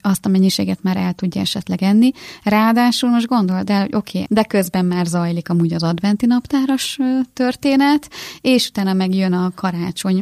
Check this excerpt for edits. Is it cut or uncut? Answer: cut